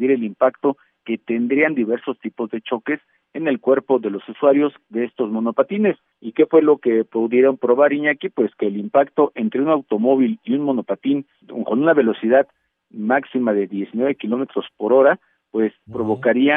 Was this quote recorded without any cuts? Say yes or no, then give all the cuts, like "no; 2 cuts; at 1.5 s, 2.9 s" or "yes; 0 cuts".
yes; 0 cuts